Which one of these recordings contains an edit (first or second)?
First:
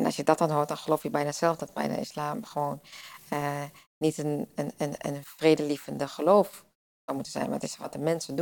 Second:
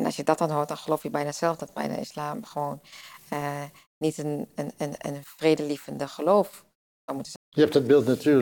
second